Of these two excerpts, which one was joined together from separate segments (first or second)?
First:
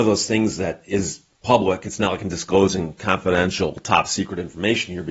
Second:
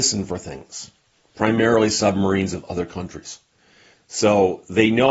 second